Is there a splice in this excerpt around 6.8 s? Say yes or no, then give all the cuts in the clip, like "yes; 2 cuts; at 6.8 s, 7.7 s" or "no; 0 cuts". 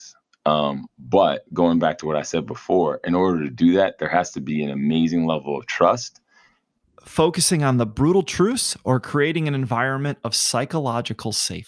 yes; 1 cut; at 6.8 s